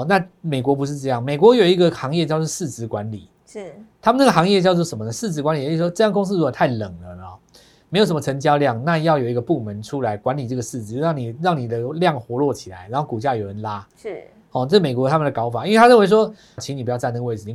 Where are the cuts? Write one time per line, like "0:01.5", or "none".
0:16.6